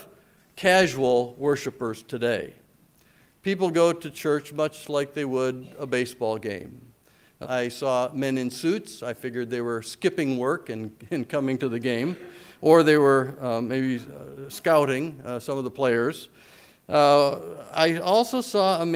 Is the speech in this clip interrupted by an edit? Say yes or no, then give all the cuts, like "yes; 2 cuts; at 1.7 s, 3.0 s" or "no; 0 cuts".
yes; 1 cut; at 7.4 s